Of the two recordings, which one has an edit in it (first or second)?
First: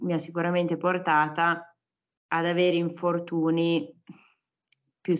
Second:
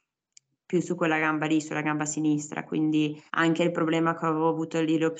second